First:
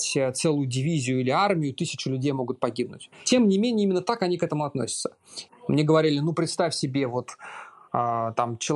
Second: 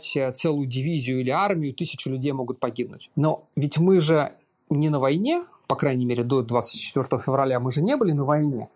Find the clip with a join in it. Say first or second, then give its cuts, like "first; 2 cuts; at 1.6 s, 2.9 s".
first; 2 cuts; at 3.1 s, 5.5 s